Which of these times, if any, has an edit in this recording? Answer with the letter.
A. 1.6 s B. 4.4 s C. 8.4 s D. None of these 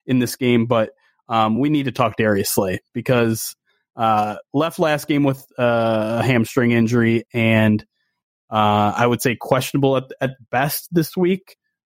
D